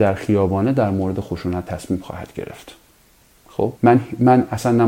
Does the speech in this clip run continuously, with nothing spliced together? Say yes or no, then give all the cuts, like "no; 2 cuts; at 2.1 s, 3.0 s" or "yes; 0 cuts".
no; 1 cut; at 3.8 s